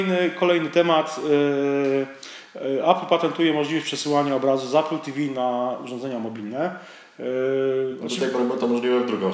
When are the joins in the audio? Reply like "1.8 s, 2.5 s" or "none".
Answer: none